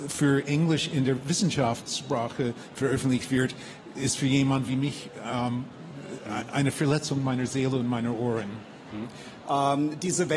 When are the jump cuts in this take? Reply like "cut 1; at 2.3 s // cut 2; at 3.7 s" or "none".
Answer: cut 1; at 9.4 s